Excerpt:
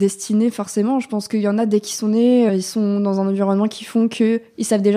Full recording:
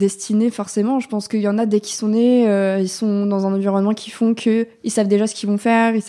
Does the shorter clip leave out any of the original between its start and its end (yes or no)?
yes